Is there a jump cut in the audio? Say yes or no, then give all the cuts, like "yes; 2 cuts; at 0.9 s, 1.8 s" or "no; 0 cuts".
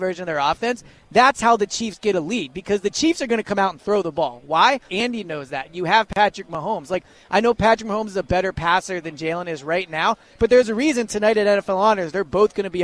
yes; 1 cut; at 4.9 s